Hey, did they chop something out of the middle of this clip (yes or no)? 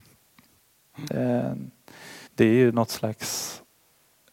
yes